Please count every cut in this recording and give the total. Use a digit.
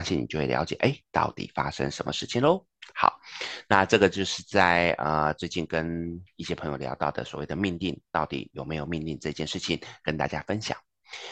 0